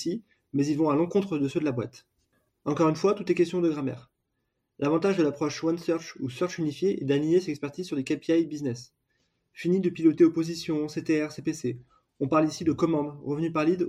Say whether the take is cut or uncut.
cut